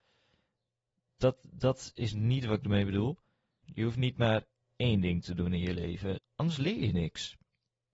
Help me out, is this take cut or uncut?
cut